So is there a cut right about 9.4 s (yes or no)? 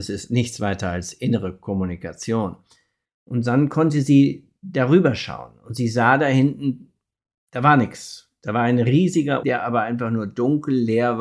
yes